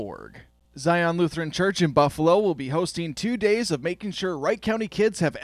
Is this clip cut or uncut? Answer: uncut